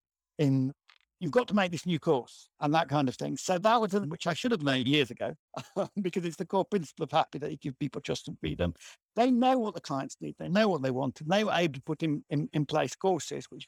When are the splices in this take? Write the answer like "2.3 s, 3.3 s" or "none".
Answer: 4.0 s, 9.0 s